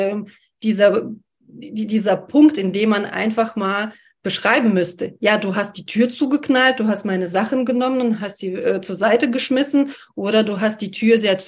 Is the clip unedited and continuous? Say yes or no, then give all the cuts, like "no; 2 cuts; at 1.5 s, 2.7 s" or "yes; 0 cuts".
yes; 0 cuts